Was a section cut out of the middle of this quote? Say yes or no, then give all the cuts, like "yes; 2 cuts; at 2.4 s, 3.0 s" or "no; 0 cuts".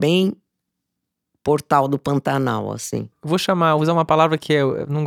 yes; 1 cut; at 3.1 s